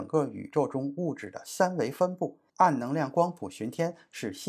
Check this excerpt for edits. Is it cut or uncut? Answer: cut